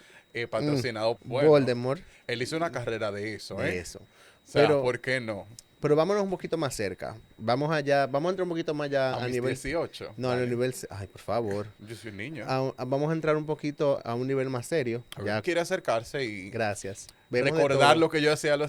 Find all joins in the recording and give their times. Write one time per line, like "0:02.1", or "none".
0:01.2
0:14.0
0:15.4